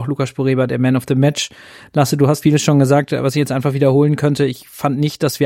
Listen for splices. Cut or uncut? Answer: uncut